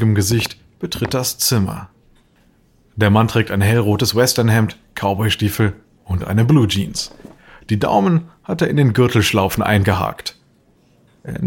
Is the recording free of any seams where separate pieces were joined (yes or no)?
yes